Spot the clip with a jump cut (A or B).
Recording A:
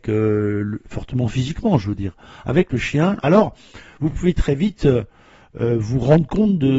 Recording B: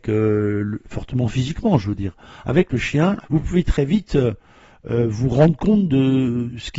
B